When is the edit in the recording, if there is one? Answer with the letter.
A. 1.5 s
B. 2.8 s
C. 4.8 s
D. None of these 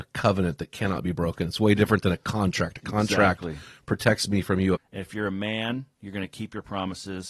C